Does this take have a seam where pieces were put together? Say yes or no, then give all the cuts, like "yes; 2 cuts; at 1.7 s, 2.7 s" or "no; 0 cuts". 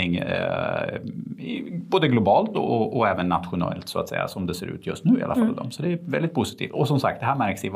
no; 0 cuts